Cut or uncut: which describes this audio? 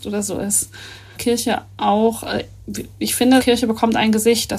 cut